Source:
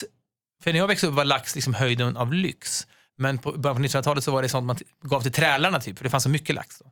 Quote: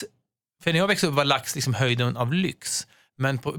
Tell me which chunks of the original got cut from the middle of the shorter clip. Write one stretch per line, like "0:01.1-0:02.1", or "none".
none